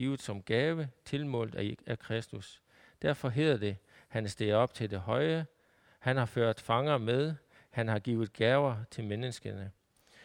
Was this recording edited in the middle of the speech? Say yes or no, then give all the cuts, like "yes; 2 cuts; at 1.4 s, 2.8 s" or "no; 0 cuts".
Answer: no; 0 cuts